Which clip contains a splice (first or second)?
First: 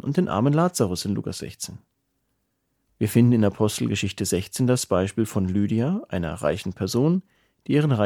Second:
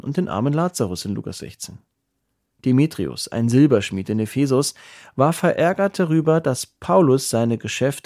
second